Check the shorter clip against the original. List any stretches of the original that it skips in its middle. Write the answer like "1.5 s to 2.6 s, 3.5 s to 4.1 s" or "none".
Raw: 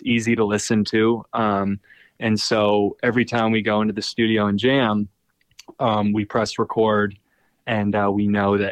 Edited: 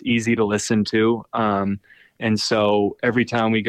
none